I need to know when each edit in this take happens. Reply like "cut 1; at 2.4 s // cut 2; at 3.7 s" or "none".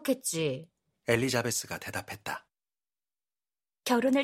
cut 1; at 1.0 s